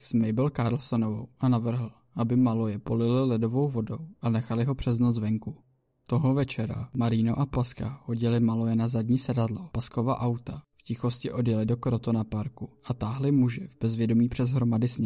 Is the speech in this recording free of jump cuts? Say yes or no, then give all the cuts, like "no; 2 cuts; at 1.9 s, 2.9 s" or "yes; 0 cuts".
yes; 0 cuts